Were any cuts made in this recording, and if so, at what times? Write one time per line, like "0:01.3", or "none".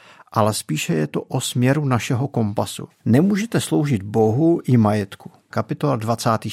0:02.9
0:05.5

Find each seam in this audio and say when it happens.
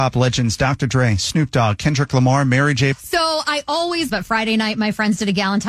0:02.9
0:04.1

